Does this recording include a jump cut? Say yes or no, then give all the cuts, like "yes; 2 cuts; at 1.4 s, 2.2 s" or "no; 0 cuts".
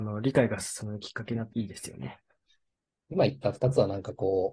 yes; 1 cut; at 1.5 s